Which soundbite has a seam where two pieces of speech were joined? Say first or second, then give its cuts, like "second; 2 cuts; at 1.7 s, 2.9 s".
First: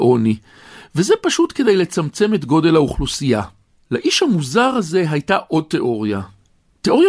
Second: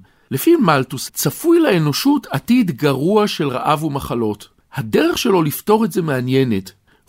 second; 1 cut; at 1.1 s